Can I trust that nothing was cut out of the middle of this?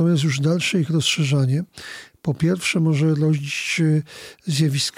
yes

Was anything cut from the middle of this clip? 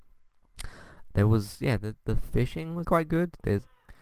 yes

